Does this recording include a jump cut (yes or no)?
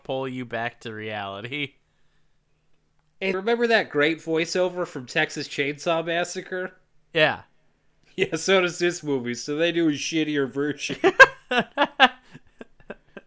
yes